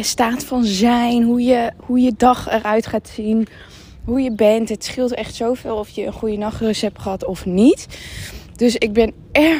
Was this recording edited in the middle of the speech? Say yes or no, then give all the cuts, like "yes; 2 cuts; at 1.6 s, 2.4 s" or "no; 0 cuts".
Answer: no; 0 cuts